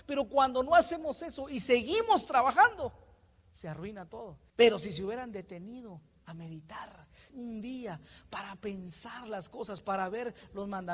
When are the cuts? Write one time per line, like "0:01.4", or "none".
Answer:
0:04.5
0:07.3